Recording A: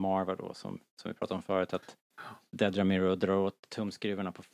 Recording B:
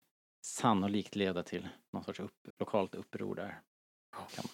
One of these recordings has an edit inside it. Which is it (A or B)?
B